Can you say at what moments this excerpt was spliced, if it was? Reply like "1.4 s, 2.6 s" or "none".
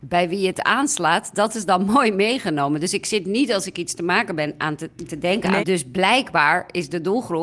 5.6 s